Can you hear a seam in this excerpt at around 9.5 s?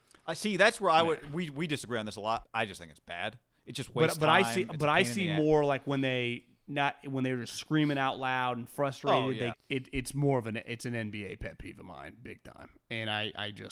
yes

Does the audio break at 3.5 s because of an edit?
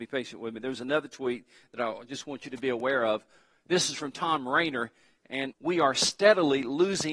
no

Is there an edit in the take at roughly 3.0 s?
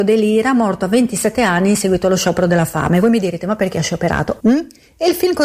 no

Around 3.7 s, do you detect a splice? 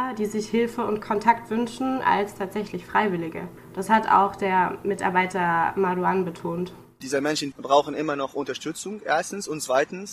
no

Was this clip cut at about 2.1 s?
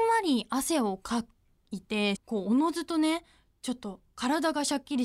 yes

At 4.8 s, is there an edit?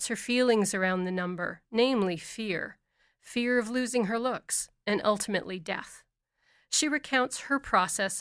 yes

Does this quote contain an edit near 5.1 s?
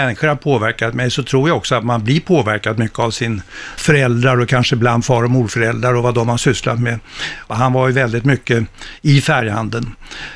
no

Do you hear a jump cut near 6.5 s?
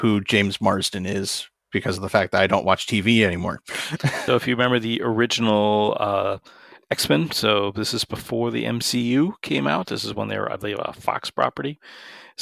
no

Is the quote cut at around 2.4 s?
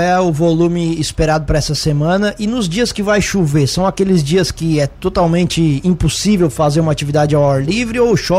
no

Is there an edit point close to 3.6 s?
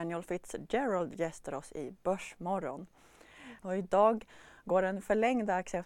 yes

